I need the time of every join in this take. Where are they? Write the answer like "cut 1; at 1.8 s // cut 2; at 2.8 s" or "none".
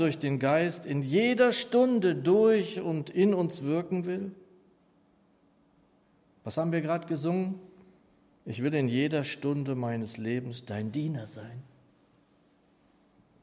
none